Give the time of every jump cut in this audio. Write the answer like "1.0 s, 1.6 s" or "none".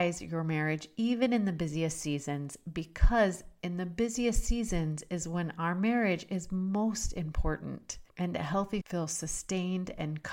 8.8 s